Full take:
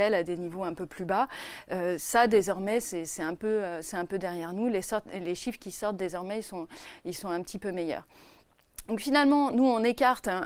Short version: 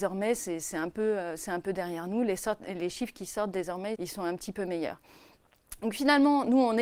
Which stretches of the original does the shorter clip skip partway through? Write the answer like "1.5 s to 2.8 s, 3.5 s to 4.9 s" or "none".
6.4 s to 7.0 s